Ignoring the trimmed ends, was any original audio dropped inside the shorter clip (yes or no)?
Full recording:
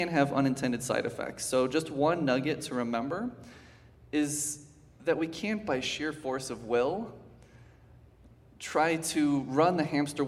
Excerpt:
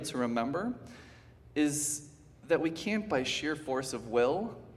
no